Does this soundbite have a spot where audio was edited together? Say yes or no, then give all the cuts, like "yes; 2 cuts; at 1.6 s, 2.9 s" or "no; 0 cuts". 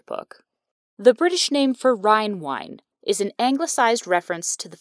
yes; 1 cut; at 2.9 s